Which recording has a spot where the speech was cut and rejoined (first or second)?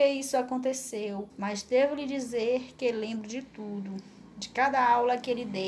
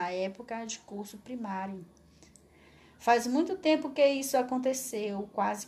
first